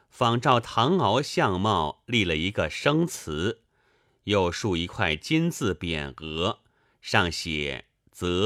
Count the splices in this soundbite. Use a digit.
0